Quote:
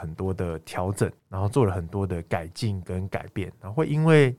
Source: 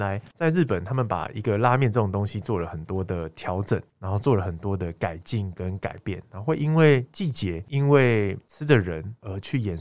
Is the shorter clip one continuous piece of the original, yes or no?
yes